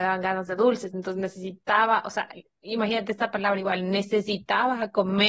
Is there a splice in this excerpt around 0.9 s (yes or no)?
no